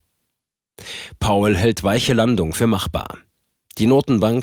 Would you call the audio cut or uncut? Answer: uncut